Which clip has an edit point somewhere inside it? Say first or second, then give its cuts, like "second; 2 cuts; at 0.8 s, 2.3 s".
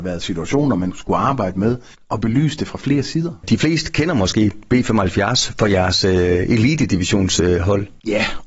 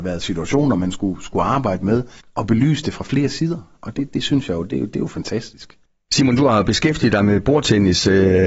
first; 2 cuts; at 0.9 s, 3.4 s